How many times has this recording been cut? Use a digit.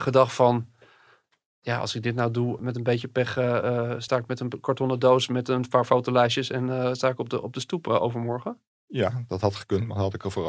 0